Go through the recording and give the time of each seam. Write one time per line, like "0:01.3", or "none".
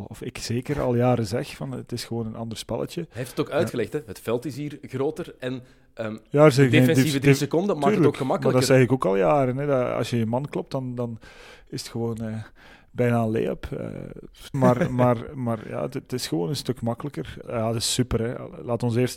0:14.5
0:17.4